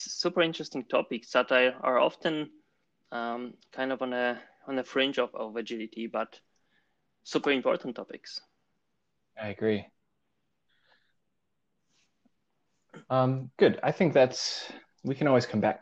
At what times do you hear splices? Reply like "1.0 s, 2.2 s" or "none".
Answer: none